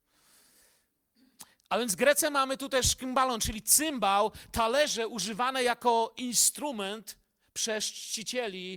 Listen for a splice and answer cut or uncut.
uncut